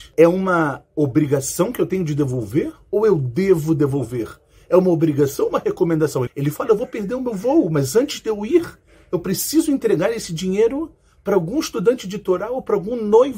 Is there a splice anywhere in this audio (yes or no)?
yes